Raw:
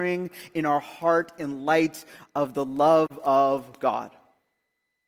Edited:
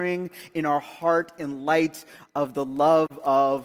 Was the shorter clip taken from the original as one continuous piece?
yes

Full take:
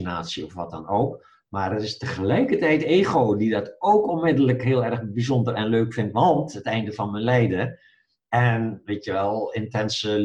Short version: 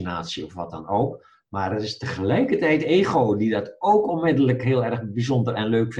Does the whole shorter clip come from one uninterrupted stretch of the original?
yes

